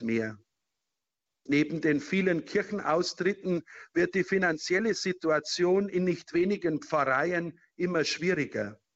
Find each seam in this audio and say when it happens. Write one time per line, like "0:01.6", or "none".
0:01.3